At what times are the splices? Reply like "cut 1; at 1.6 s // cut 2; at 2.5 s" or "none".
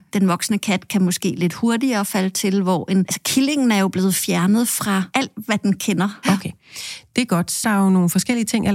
cut 1; at 6.2 s // cut 2; at 7.6 s

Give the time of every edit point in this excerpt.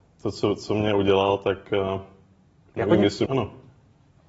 cut 1; at 3.3 s

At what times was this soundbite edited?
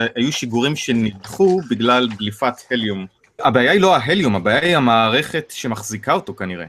cut 1; at 3.4 s

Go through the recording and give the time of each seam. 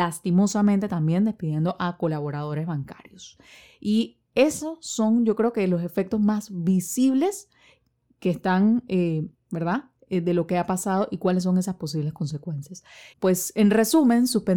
cut 1; at 9.3 s // cut 2; at 13.1 s

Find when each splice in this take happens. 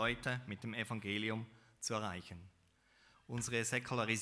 cut 1; at 3.1 s

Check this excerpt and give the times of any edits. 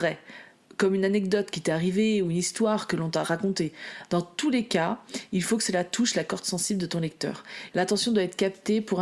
cut 1; at 7.7 s

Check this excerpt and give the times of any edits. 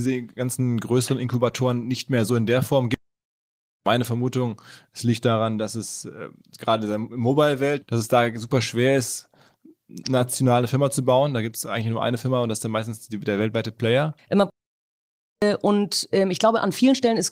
cut 1; at 7.8 s // cut 2; at 14.2 s

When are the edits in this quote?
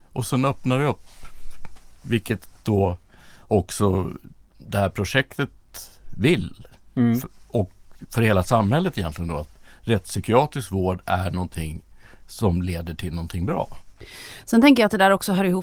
none

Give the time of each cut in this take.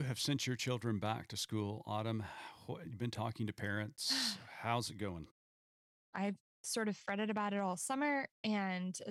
cut 1; at 6.1 s

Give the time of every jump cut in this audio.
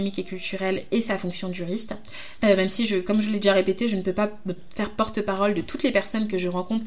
cut 1; at 2.4 s

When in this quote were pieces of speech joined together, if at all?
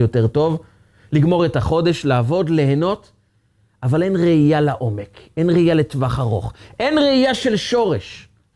none

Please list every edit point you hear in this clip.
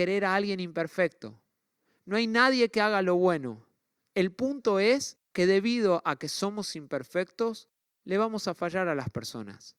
cut 1; at 4.0 s // cut 2; at 5.3 s

